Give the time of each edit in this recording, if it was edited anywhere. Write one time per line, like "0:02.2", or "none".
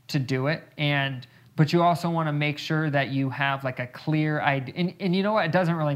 0:01.4